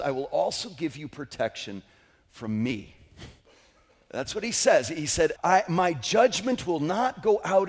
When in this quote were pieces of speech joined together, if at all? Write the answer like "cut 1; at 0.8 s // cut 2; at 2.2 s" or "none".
cut 1; at 5.4 s